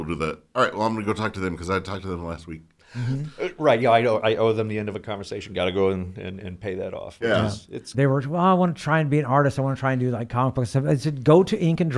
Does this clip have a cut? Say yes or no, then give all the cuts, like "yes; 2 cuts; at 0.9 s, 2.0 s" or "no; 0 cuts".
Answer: yes; 1 cut; at 7.9 s